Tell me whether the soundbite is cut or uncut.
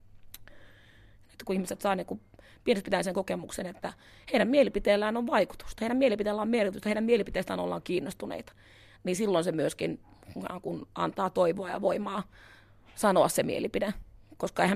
cut